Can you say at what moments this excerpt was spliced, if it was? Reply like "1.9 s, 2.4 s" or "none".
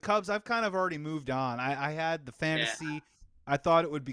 none

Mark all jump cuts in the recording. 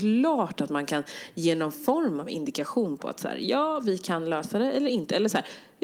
none

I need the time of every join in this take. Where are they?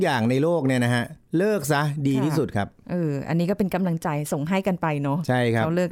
none

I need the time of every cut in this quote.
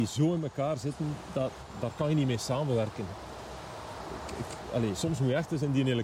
none

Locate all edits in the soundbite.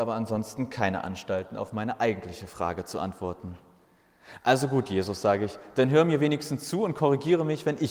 none

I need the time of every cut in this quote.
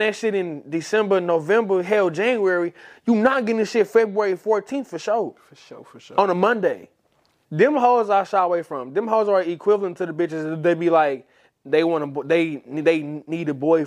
7.4 s

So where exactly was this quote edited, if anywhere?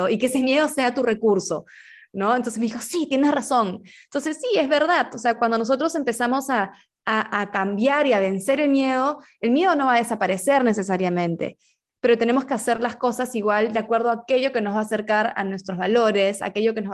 none

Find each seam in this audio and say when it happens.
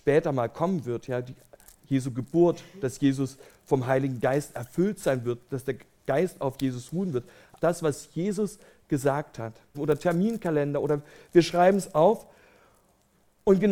7.6 s, 9.7 s

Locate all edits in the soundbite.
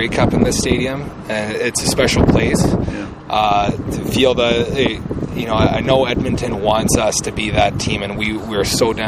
none

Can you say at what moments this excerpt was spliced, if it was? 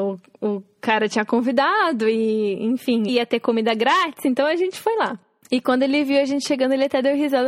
3.1 s

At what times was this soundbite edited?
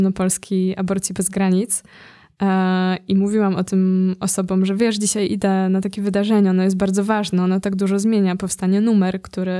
none

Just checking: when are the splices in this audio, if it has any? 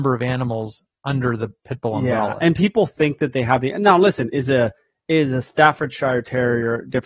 none

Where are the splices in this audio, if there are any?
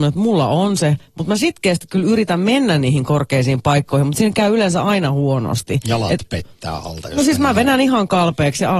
none

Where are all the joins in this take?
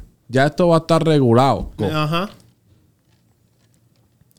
1.8 s

